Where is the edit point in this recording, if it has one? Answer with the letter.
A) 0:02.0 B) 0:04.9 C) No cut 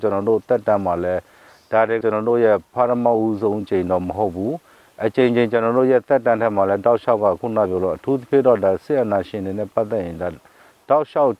A